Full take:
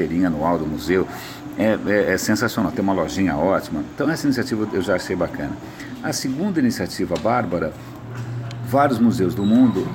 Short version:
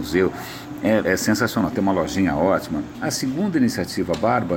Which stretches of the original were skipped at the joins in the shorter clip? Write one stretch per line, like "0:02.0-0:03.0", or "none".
0:01.8-0:02.1
0:04.0-0:06.0